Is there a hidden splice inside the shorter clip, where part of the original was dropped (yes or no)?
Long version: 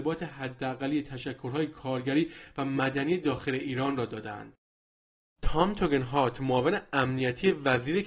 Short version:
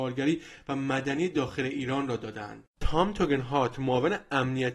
yes